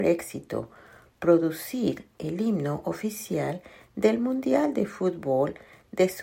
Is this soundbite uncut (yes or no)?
yes